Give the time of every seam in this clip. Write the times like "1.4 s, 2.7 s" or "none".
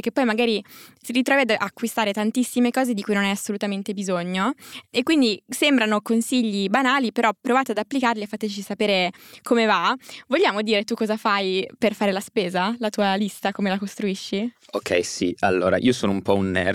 none